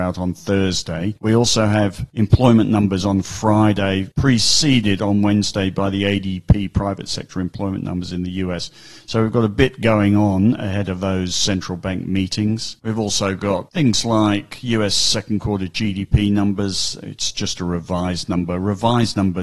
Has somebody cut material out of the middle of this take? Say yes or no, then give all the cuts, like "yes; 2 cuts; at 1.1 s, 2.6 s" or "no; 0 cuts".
no; 0 cuts